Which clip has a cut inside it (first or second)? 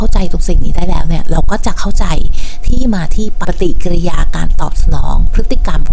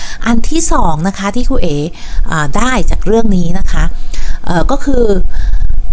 first